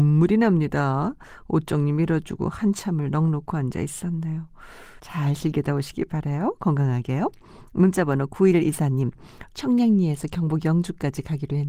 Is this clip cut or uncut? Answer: cut